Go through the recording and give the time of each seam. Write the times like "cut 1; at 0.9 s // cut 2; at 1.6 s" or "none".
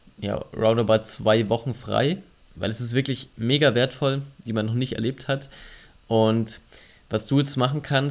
cut 1; at 2.4 s // cut 2; at 4.5 s